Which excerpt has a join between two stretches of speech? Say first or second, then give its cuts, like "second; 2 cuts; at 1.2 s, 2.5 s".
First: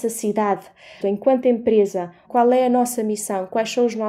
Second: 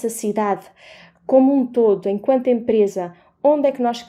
first; 2 cuts; at 1.0 s, 2.2 s